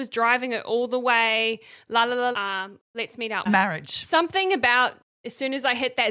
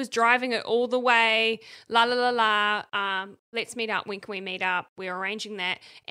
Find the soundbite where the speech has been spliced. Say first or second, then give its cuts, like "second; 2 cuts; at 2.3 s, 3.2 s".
first; 2 cuts; at 2.3 s, 3.5 s